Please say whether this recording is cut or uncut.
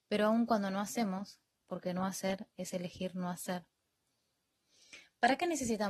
cut